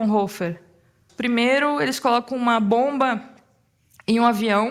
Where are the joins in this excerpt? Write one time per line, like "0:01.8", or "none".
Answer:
0:01.1